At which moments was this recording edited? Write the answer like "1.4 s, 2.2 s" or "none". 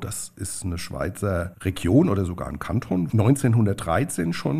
1.5 s, 3.1 s